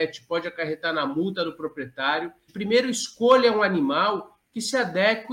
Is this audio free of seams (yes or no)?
no